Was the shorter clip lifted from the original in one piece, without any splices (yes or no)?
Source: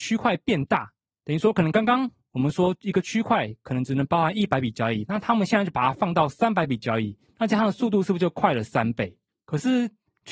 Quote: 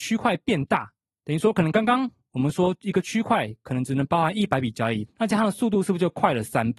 no